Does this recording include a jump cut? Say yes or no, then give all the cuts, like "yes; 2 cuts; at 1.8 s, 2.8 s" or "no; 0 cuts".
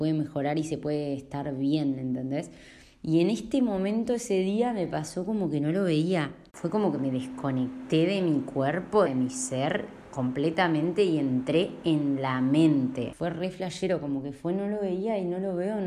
yes; 2 cuts; at 6.5 s, 9.1 s